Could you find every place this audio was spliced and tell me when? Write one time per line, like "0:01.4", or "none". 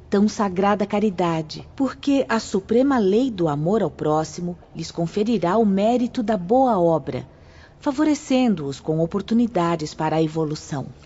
0:01.7